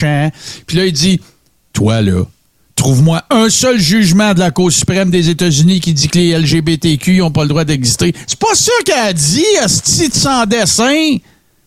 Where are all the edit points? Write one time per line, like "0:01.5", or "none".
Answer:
none